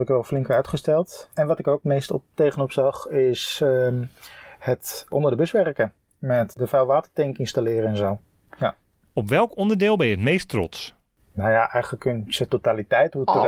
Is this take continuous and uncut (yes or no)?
no